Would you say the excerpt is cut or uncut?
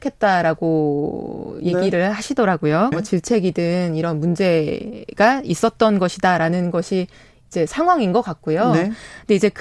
cut